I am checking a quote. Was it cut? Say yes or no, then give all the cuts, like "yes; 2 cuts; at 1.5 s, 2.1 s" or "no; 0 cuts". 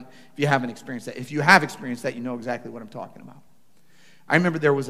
no; 0 cuts